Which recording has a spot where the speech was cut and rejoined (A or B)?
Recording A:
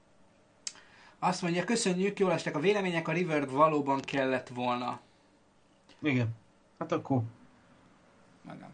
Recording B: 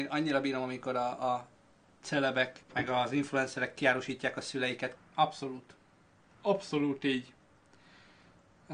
B